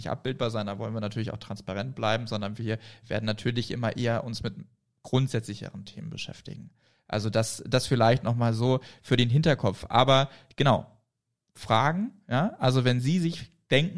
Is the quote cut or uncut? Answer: uncut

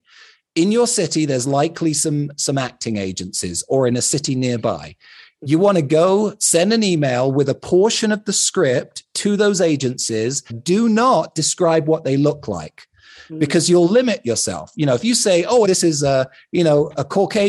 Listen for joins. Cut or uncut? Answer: cut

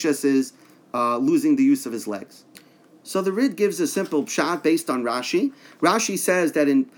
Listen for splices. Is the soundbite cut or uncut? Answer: uncut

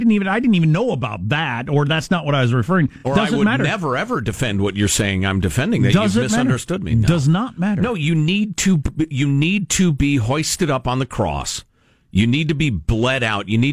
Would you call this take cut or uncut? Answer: uncut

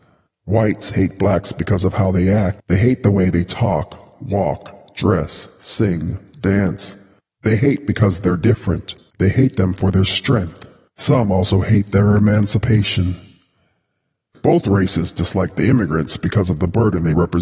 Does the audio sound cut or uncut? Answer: uncut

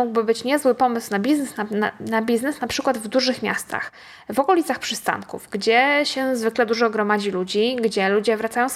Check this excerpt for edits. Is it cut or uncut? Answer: uncut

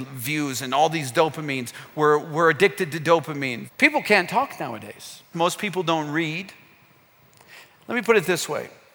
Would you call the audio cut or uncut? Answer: cut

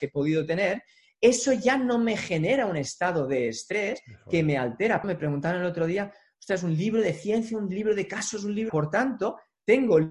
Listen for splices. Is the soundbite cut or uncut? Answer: cut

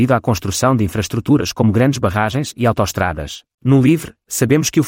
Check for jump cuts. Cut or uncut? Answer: cut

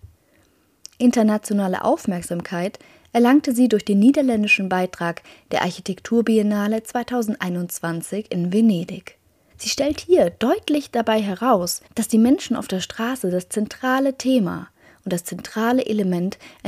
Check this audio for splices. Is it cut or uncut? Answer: cut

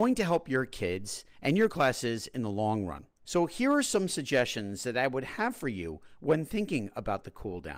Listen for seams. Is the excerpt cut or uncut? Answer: cut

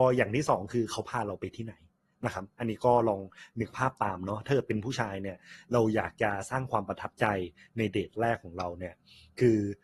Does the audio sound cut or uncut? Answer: uncut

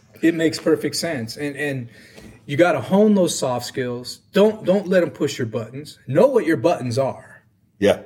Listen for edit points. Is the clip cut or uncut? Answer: uncut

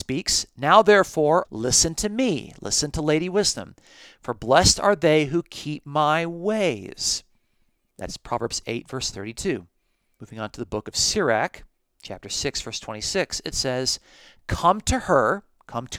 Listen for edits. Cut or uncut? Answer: cut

